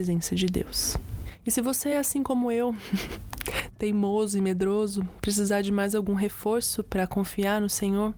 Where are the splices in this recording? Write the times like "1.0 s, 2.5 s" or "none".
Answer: none